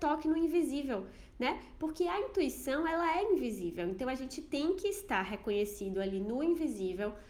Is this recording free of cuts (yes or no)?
yes